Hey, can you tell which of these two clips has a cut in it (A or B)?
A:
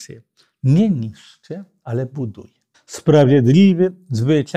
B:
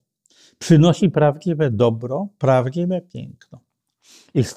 A